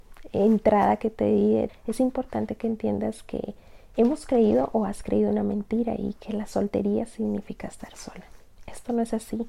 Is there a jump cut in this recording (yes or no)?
yes